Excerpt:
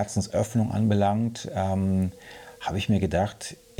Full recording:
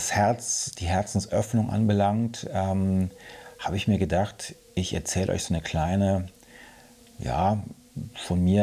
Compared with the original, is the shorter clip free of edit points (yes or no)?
yes